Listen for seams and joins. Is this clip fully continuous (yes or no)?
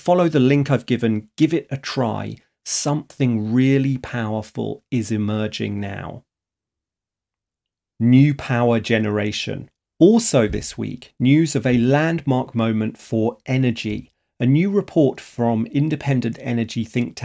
yes